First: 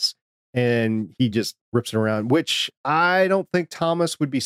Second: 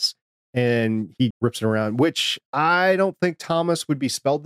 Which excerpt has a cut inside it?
second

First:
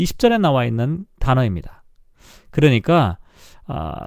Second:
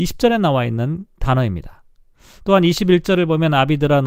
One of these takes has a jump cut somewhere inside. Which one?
second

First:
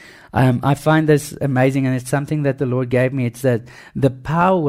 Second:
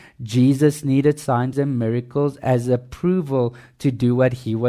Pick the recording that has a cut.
second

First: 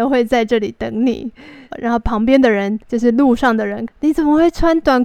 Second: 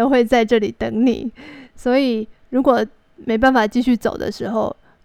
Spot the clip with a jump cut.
first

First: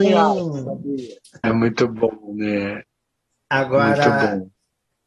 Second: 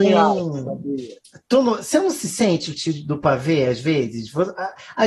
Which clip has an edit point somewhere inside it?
first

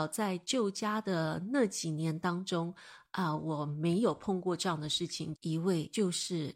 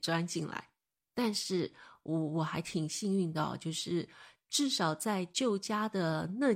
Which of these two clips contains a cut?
first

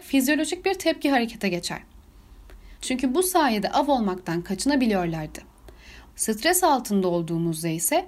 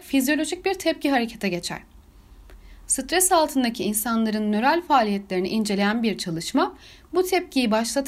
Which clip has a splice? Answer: first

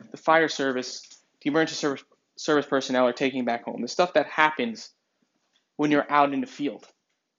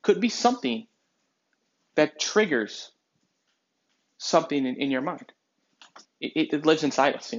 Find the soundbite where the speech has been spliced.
second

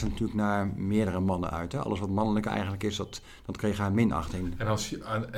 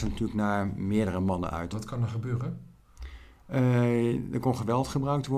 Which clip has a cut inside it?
second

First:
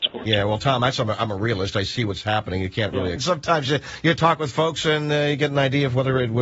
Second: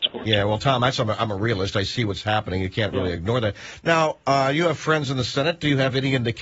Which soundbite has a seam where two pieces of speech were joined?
first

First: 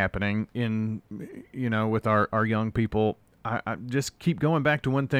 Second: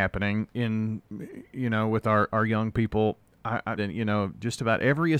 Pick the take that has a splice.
second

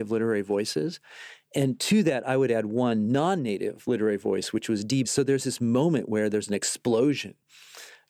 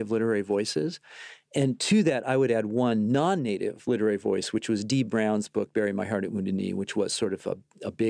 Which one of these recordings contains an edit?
first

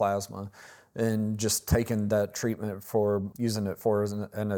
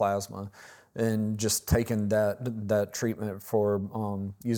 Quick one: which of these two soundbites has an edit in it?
first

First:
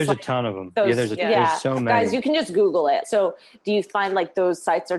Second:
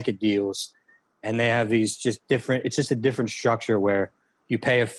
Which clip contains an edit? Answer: first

